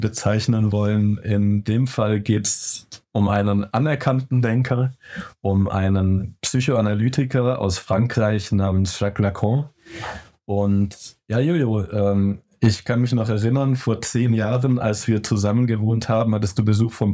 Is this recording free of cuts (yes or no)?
yes